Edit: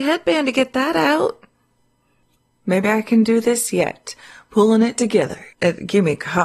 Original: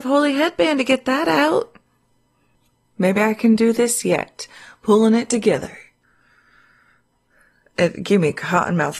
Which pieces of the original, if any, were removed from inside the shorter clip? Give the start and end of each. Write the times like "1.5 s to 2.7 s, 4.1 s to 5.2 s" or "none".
5.8 s to 7.7 s